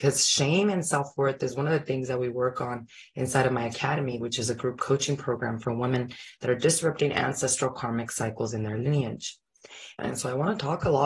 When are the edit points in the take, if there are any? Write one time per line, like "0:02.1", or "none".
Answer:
0:04.2
0:10.0